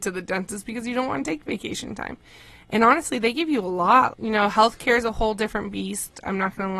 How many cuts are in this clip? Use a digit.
1